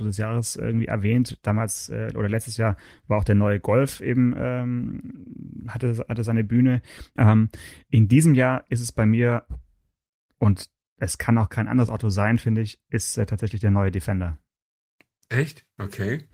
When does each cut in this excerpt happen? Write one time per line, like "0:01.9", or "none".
0:07.2